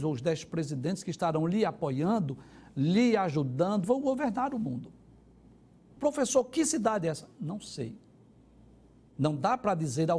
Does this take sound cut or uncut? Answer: cut